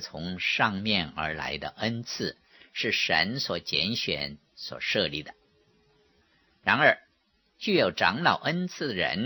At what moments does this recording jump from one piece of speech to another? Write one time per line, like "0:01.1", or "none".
none